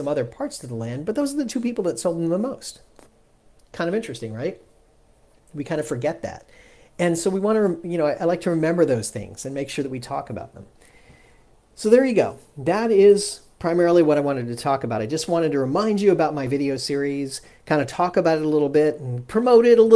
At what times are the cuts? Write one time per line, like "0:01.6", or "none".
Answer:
none

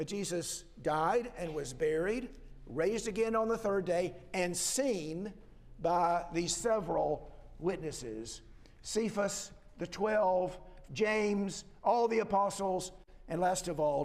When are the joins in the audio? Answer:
0:10.9

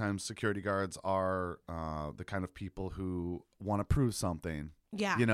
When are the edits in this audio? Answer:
0:03.5

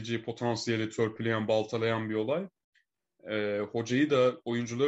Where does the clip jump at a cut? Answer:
none

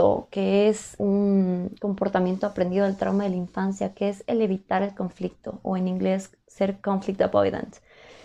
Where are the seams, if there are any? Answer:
0:01.0

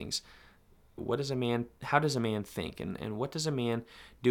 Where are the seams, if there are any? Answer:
0:01.0

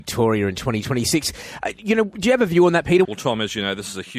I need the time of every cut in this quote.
0:03.0

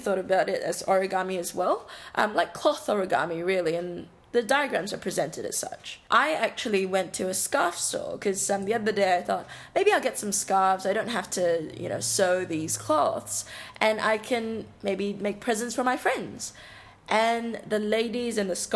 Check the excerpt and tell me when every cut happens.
none

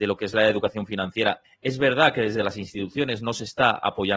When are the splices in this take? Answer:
0:01.4

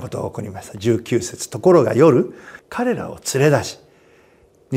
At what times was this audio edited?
0:02.6

